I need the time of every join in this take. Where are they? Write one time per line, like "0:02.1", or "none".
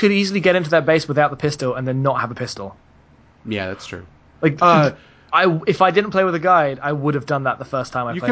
none